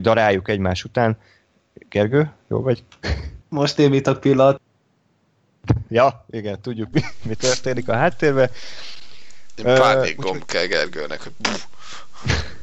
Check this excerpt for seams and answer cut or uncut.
cut